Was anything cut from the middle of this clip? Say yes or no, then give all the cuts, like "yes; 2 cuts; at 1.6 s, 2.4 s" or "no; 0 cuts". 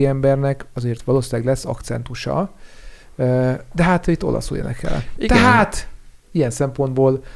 no; 0 cuts